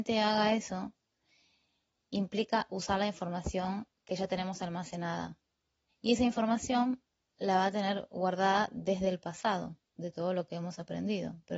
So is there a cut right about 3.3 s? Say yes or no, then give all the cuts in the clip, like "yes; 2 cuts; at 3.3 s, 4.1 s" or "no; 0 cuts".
no; 2 cuts; at 5.9 s, 9.9 s